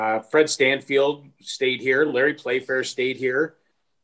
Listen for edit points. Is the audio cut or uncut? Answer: uncut